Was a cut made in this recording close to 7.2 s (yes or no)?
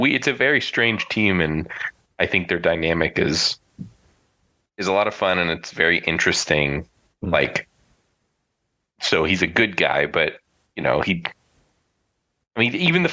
yes